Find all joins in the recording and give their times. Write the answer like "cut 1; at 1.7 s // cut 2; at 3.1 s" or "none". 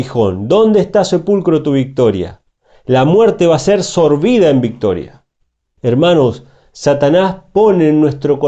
cut 1; at 5.8 s